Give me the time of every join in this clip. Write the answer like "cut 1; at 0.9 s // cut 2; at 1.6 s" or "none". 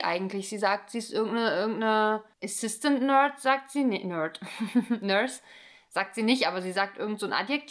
none